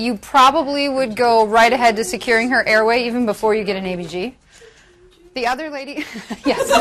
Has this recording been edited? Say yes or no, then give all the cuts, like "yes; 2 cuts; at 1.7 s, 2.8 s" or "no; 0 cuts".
no; 0 cuts